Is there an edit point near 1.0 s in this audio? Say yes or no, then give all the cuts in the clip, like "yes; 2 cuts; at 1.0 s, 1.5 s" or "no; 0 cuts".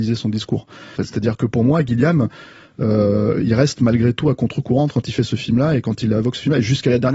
yes; 1 cut; at 1.0 s